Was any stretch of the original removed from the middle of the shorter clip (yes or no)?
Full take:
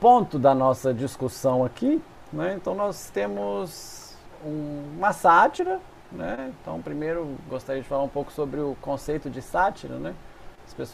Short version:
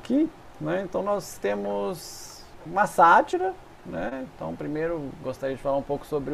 yes